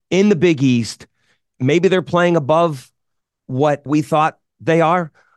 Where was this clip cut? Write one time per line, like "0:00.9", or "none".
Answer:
0:01.4
0:03.9